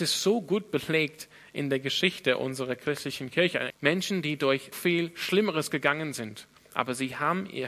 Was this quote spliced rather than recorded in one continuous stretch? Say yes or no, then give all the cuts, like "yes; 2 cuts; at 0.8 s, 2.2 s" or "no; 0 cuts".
yes; 2 cuts; at 3.7 s, 4.7 s